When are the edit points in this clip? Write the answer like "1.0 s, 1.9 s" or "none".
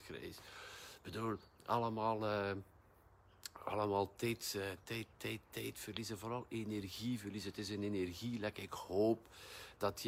none